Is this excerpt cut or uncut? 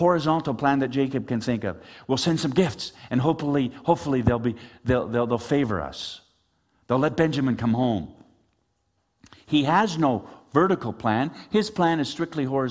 uncut